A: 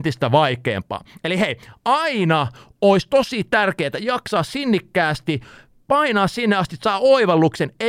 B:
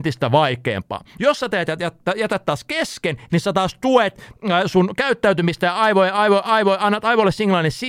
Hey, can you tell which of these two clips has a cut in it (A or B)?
B